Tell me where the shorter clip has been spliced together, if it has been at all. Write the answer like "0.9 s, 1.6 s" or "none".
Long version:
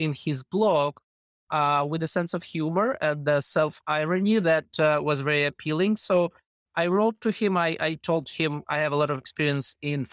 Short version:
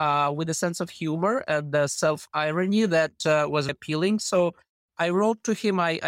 3.7 s